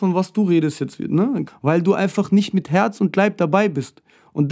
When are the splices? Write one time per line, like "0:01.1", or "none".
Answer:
0:01.5